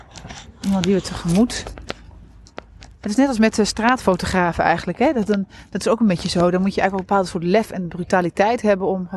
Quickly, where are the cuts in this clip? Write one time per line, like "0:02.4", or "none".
none